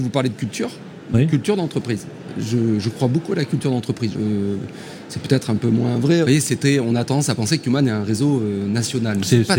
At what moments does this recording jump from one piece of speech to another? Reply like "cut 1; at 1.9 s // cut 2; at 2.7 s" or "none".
cut 1; at 4.1 s // cut 2; at 6.2 s